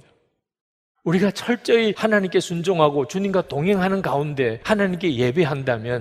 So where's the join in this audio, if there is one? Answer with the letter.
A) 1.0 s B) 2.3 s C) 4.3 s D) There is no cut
A